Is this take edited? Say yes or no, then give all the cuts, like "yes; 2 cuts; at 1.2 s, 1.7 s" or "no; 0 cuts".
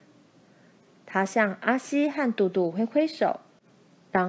no; 0 cuts